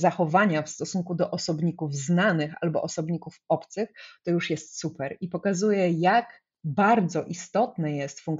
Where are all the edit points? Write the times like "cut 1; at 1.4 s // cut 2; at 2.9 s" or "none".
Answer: none